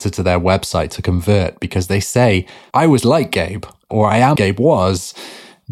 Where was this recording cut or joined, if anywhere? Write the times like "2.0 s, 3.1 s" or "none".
2.7 s, 4.4 s